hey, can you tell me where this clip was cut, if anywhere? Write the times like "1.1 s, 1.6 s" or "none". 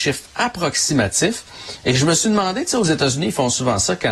none

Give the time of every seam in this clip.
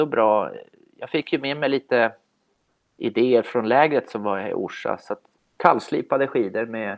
5.6 s

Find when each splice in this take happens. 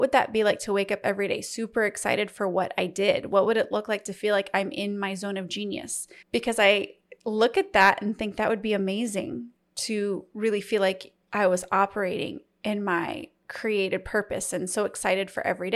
6.2 s, 11.2 s

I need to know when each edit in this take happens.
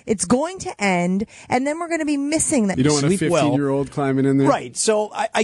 2.7 s

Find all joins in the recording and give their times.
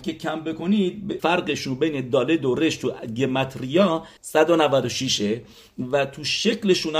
1.2 s, 4.2 s

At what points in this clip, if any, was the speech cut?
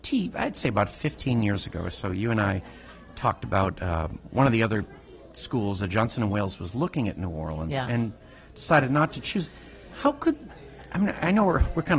none

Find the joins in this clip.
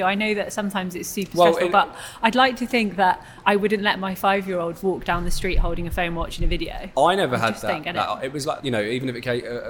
8.6 s

